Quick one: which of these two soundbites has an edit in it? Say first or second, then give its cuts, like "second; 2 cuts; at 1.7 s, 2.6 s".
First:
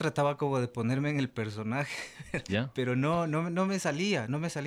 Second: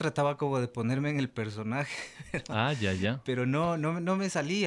first; 1 cut; at 2.5 s